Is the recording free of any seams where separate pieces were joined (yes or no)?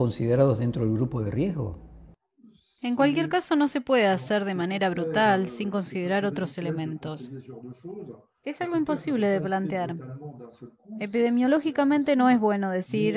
yes